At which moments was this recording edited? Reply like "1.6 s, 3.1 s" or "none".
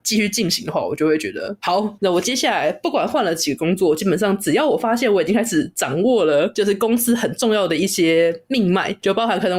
2.0 s